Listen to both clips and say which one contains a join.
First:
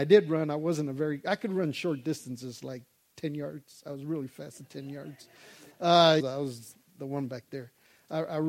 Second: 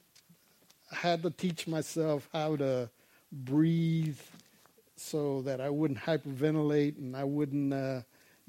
first; 1 cut; at 6.2 s

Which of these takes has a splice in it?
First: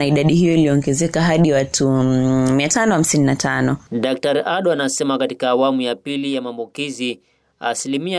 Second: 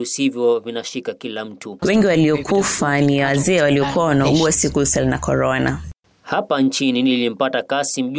second; 1 cut; at 1.8 s

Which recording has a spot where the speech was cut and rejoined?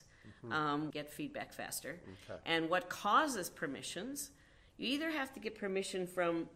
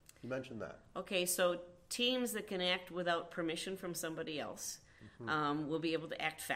first; 1 cut; at 0.9 s

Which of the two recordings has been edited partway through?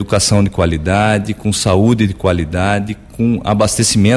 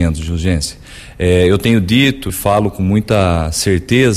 second; 1 cut; at 2.3 s

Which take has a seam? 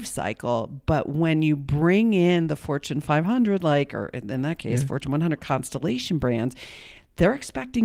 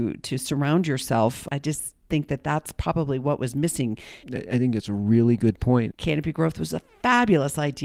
second; 2 cuts; at 4.2 s, 5.9 s

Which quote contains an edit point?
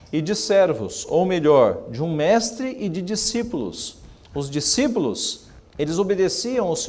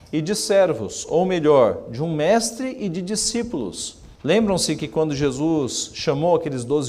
second; 1 cut; at 4.2 s

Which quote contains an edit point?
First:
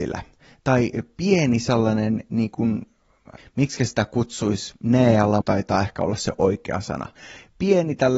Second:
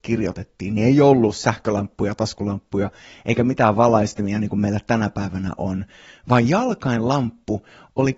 first; 2 cuts; at 3.4 s, 5.4 s

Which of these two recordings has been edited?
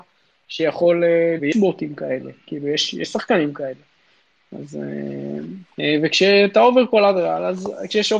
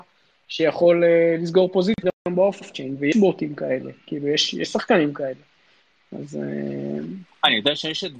first; 2 cuts; at 1.4 s, 5.7 s

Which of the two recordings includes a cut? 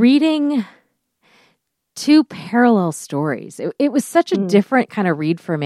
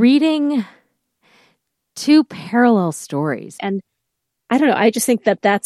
second; 1 cut; at 3.6 s

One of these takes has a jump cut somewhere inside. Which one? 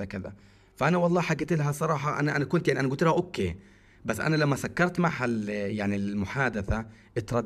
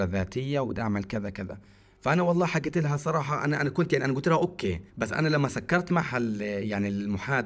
second; 1 cut; at 4.9 s

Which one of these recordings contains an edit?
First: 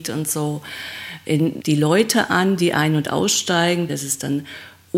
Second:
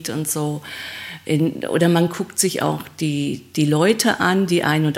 first; 2 cuts; at 1.6 s, 3.9 s

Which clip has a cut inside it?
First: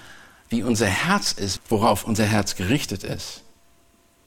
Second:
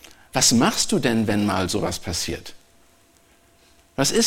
first; 1 cut; at 1.6 s

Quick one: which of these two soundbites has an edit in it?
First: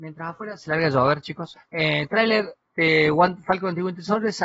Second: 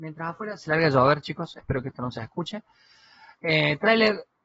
first; 1 cut; at 1.5 s

